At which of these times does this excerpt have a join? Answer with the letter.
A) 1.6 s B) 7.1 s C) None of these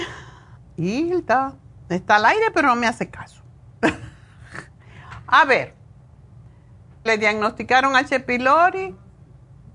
B